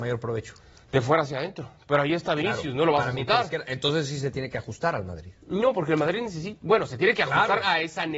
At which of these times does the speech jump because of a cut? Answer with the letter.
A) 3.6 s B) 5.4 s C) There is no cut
C